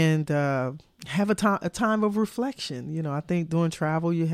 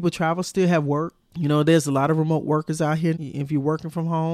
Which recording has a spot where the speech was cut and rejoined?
second; 2 cuts; at 1.2 s, 3.1 s

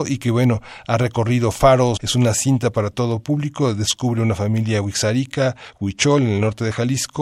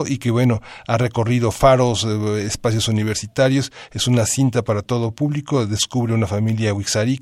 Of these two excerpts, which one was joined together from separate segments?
first; 1 cut; at 2.0 s

